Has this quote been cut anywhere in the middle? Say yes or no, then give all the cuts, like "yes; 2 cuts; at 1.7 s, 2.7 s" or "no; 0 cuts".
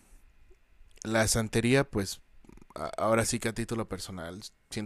no; 0 cuts